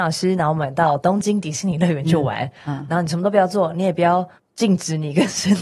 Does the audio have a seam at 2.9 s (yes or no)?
no